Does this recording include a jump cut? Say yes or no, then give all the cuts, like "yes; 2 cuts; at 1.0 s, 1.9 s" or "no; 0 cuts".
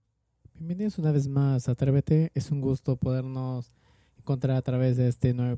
no; 0 cuts